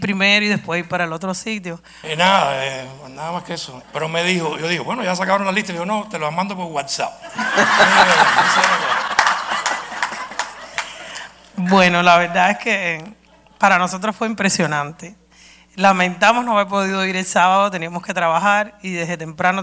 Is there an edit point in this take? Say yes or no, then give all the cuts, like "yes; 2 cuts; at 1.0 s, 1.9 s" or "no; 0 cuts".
yes; 2 cuts; at 2.0 s, 3.8 s